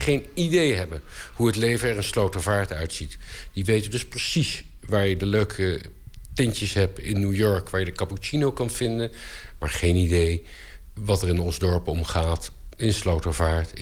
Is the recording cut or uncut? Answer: uncut